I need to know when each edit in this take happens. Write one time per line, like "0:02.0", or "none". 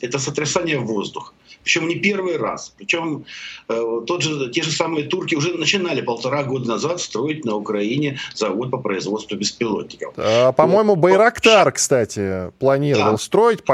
none